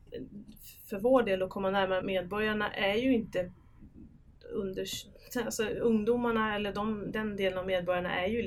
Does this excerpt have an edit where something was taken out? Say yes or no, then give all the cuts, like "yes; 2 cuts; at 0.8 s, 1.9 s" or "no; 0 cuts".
yes; 1 cut; at 2.0 s